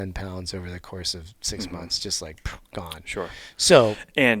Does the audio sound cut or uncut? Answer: uncut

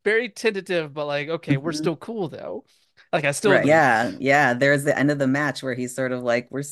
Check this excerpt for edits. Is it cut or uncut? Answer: cut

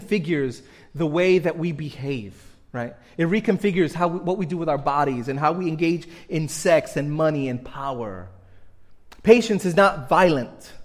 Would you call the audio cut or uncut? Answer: uncut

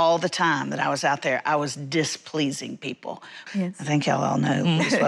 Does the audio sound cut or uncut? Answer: cut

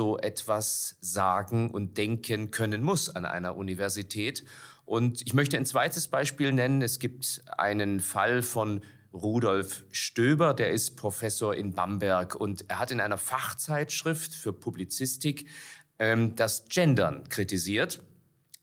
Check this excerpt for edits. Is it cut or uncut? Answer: uncut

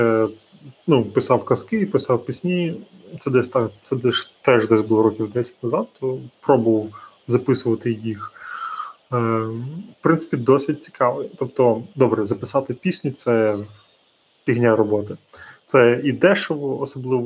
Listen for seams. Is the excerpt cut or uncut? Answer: uncut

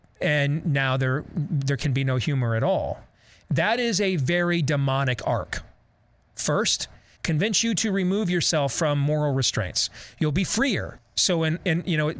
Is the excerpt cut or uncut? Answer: cut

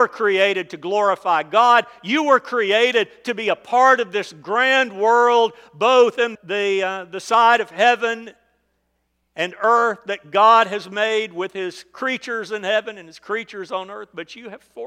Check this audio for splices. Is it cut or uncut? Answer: cut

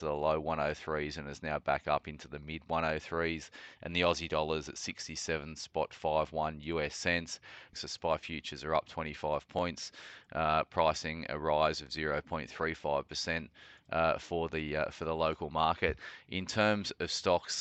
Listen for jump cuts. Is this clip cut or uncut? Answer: cut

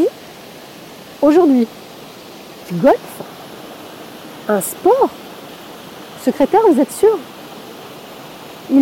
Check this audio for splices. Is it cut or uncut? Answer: uncut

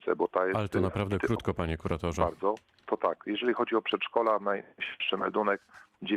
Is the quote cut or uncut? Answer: uncut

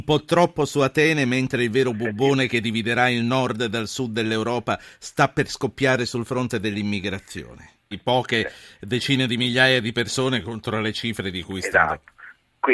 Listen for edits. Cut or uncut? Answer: cut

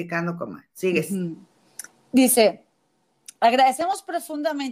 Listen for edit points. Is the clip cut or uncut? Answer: uncut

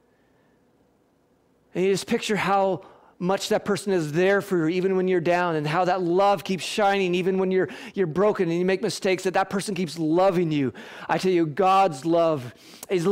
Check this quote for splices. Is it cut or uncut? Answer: uncut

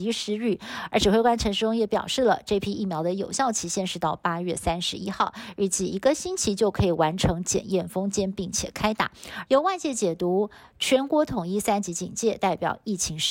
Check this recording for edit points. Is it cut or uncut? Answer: cut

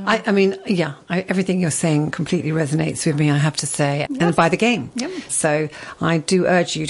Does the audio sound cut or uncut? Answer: cut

